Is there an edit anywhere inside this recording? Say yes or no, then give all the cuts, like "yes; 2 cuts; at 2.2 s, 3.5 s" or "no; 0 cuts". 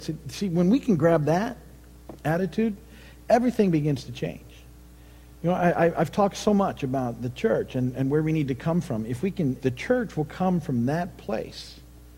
yes; 1 cut; at 9.6 s